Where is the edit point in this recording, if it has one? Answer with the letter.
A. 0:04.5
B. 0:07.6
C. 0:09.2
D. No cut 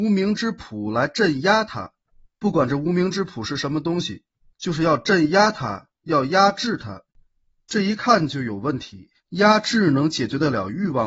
C